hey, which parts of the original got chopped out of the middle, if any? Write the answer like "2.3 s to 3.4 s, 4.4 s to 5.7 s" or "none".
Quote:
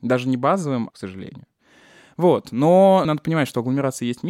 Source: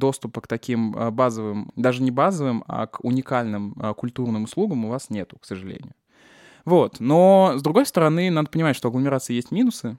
2.6 s to 5.4 s, 7.5 s to 8.3 s